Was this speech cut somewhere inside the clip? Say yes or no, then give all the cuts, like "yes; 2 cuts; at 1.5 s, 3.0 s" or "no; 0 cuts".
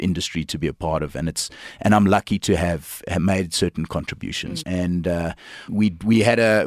yes; 2 cuts; at 4.6 s, 5.7 s